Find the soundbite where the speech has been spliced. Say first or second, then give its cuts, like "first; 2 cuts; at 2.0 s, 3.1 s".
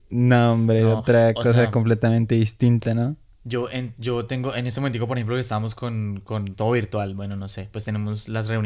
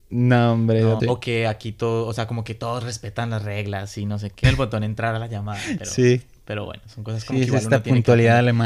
second; 2 cuts; at 1.0 s, 4.4 s